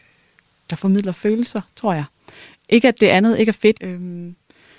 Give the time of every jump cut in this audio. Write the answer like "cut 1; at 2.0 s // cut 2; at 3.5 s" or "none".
cut 1; at 3.7 s